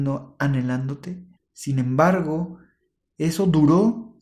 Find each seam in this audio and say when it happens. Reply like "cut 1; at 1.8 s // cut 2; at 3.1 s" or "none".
cut 1; at 1.4 s